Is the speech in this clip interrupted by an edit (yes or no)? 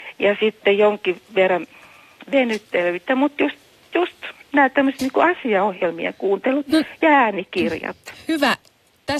no